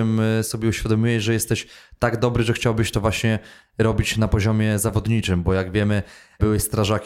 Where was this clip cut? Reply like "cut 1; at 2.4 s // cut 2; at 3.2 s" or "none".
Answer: none